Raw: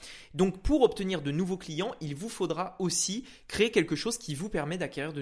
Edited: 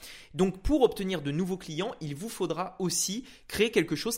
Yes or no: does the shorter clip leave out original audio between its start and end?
no